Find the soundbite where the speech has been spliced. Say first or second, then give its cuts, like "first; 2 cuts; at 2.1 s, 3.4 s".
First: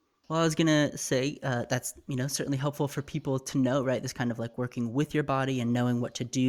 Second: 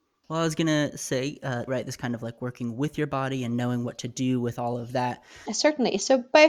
second; 2 cuts; at 1.7 s, 5.5 s